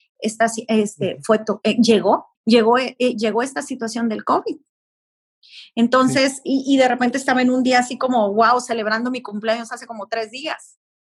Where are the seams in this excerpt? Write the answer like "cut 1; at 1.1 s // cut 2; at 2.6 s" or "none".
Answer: cut 1; at 2.4 s